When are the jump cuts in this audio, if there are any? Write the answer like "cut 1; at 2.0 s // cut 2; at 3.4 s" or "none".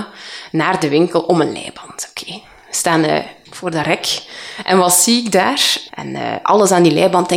cut 1; at 5.9 s